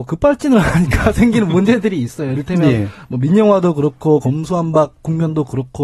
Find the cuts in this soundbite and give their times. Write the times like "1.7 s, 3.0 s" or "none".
none